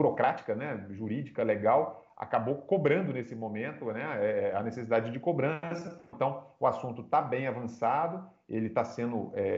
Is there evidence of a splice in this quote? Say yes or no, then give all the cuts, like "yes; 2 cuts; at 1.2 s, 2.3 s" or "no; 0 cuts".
yes; 1 cut; at 6.1 s